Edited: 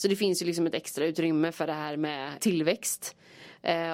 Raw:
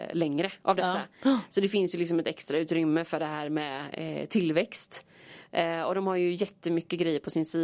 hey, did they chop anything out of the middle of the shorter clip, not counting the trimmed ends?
yes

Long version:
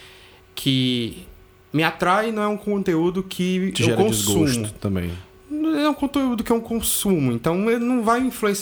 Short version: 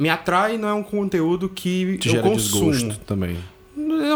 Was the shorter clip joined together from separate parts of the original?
no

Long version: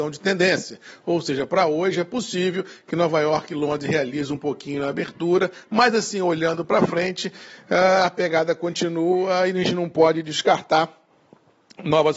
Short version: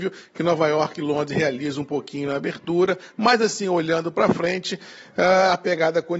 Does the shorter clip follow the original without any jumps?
yes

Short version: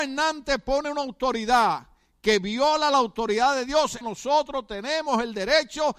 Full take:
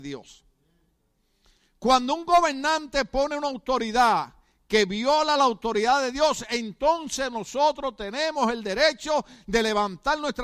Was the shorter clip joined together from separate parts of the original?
yes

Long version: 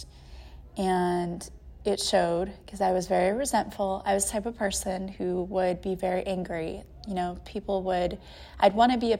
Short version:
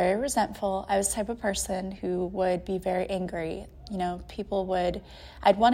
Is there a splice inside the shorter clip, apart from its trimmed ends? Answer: no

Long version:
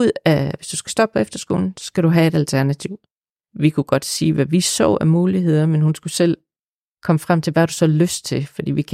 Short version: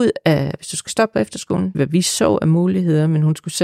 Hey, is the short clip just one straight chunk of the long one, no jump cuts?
no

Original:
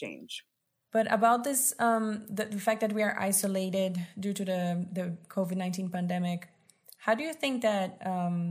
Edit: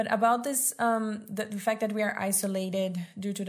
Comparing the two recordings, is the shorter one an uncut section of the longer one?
yes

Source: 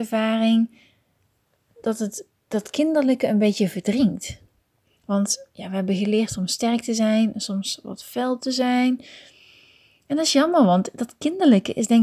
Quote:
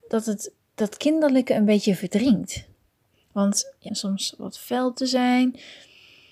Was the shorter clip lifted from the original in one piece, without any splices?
no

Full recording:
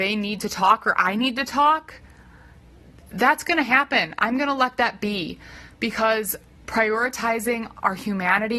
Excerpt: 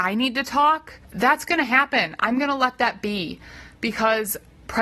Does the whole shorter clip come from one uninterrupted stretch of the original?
no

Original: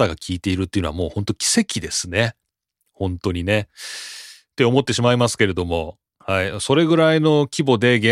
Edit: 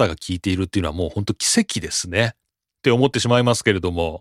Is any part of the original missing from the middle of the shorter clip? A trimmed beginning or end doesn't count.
yes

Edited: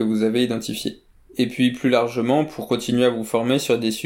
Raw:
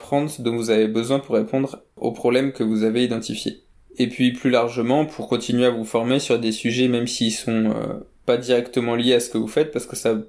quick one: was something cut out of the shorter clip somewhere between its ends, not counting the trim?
no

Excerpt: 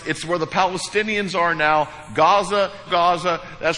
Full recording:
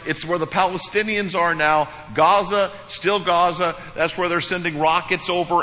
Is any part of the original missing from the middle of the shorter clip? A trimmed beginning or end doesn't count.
yes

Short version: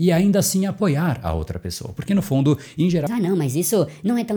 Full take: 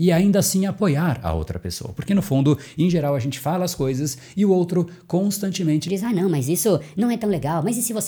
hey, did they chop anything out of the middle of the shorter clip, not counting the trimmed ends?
yes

